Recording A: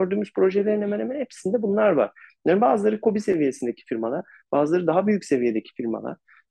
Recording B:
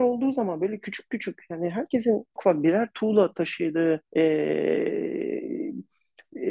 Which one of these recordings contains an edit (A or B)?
B